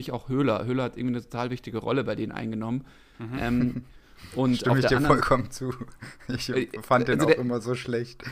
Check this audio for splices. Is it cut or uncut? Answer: cut